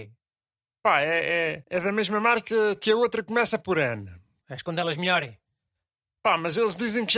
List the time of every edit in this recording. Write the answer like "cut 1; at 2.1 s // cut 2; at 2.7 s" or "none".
cut 1; at 1.6 s // cut 2; at 4.4 s